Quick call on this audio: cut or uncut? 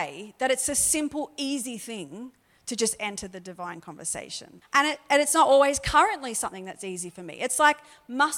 cut